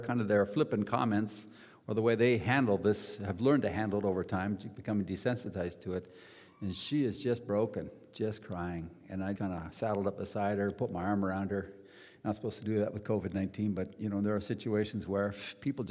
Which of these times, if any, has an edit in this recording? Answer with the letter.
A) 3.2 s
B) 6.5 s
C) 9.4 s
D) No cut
C